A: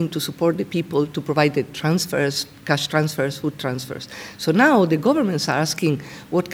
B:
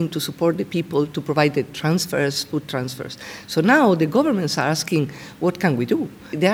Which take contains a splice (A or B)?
B